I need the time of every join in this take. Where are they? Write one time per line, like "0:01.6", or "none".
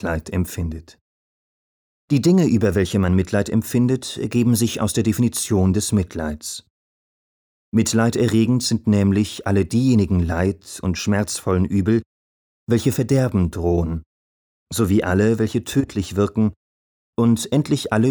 none